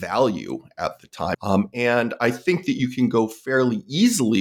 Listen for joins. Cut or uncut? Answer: cut